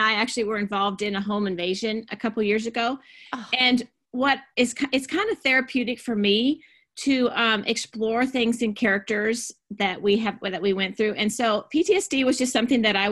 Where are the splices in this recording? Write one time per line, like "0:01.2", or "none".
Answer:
none

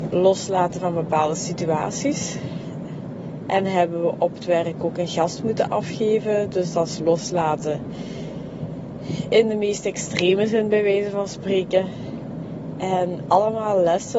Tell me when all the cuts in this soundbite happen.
none

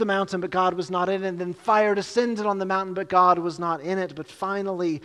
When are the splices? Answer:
none

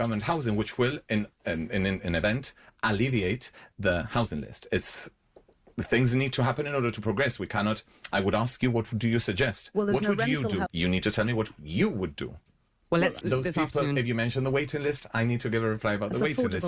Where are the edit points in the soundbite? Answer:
0:10.7
0:13.2

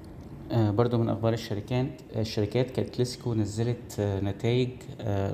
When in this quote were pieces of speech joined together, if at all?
none

